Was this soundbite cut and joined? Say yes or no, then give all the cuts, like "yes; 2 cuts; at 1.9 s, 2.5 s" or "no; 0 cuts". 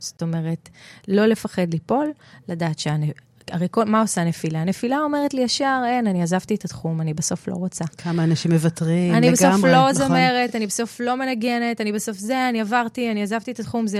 no; 0 cuts